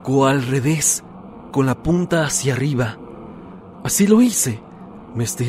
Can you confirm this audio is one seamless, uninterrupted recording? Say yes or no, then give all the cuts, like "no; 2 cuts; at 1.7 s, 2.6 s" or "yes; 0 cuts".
no; 2 cuts; at 1.5 s, 3.7 s